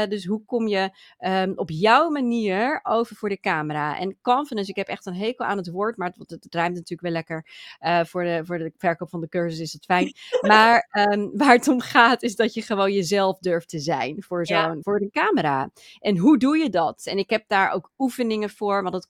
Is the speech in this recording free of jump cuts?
yes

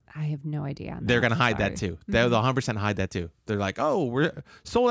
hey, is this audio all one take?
yes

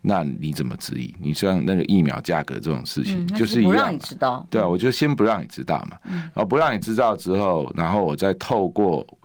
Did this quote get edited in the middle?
no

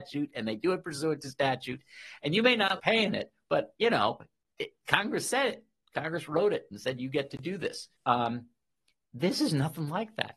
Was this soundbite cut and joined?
yes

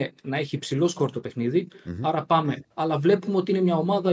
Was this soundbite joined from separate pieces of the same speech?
yes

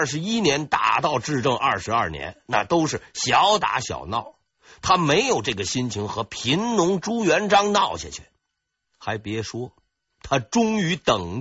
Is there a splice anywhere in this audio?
yes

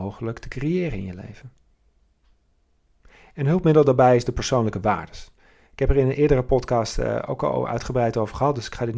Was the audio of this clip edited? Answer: no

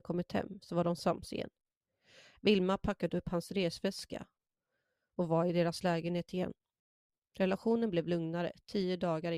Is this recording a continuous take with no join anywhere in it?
yes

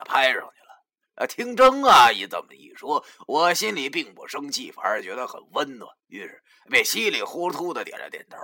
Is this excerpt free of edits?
no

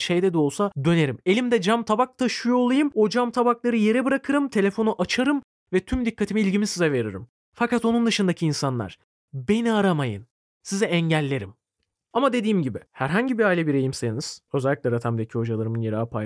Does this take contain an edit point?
yes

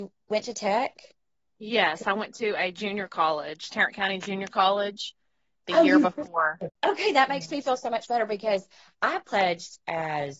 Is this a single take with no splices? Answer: yes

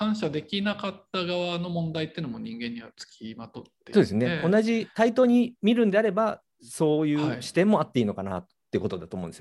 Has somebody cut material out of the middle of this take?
no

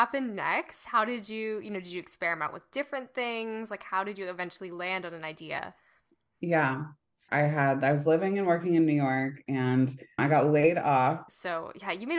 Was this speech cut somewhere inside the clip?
yes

